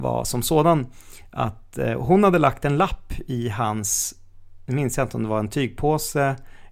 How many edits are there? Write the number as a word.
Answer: zero